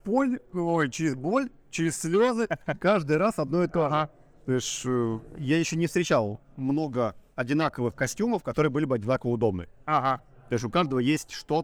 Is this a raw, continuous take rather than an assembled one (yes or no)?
yes